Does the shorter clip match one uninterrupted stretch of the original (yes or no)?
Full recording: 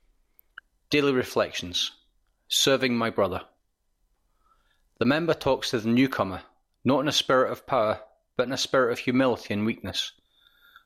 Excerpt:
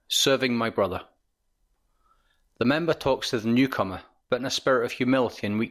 no